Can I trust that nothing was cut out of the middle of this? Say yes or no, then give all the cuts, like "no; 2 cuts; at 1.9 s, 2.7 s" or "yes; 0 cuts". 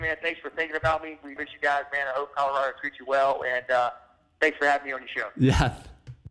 no; 1 cut; at 1.4 s